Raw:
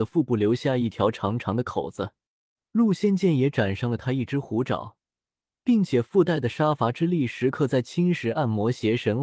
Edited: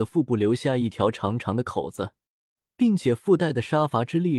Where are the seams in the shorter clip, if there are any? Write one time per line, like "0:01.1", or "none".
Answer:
0:02.6